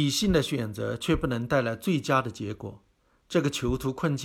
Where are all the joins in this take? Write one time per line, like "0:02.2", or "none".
none